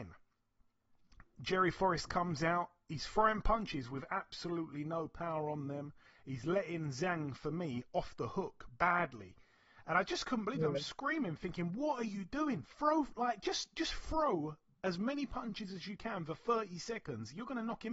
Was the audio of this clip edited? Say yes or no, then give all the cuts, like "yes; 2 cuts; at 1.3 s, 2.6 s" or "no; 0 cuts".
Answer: no; 0 cuts